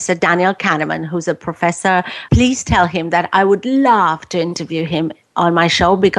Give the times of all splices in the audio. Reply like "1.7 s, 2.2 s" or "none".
2.3 s